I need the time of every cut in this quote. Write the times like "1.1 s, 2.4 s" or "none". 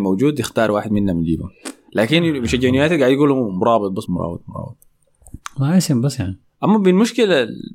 4.1 s